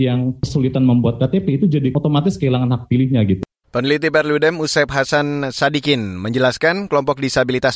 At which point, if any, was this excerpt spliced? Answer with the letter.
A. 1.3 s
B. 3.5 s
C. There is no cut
C